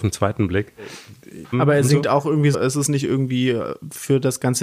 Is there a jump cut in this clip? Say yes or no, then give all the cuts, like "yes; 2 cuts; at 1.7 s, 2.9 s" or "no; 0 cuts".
yes; 2 cuts; at 1.5 s, 2.5 s